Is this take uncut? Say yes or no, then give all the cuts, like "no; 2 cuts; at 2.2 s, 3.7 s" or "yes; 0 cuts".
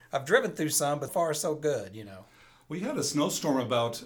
no; 1 cut; at 1.1 s